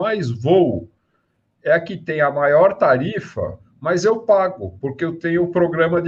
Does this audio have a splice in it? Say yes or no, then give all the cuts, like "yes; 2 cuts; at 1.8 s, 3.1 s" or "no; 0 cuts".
no; 0 cuts